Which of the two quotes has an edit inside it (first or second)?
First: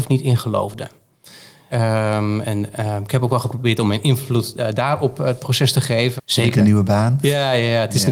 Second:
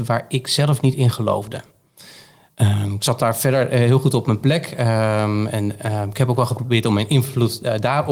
first